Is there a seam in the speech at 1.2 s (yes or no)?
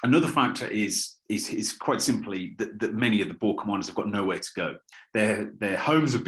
yes